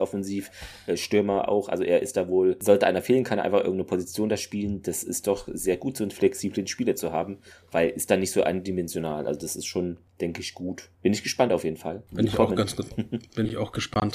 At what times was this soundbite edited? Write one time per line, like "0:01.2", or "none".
none